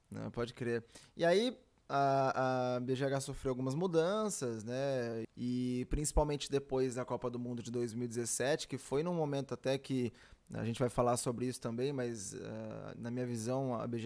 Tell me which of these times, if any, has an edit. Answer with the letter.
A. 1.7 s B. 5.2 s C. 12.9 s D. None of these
B